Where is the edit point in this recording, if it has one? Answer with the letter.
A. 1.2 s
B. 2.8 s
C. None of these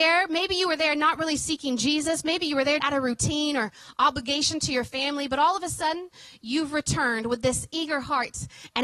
B